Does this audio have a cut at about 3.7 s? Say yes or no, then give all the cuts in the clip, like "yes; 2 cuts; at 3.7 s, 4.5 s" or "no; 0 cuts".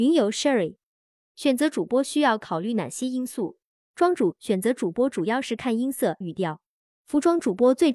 yes; 2 cuts; at 3.7 s, 6.2 s